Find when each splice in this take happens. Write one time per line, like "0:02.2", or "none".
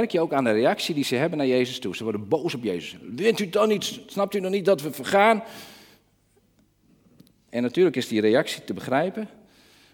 none